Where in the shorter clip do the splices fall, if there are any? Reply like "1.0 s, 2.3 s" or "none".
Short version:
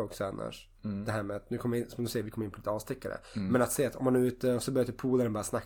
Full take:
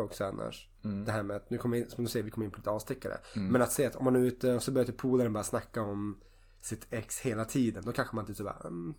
none